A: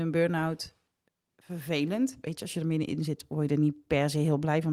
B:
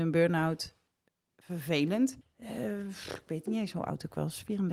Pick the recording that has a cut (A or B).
B